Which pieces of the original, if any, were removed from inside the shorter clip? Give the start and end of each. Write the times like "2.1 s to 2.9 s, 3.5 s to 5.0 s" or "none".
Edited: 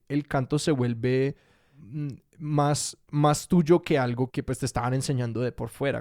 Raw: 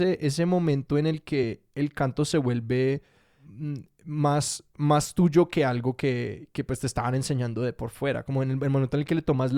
6.0 s to 6.5 s